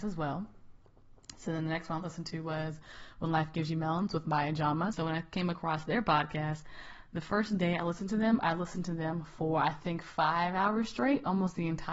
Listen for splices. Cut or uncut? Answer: cut